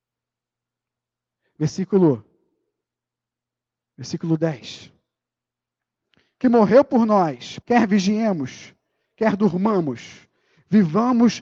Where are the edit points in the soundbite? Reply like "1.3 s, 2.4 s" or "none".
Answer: 7.6 s